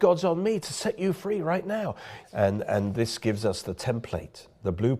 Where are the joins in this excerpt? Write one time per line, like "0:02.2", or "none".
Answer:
0:02.2